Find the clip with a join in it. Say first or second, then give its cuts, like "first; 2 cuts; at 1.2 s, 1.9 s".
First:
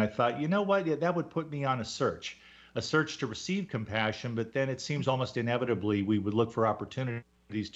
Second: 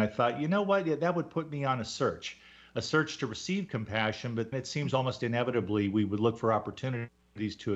second; 1 cut; at 4.5 s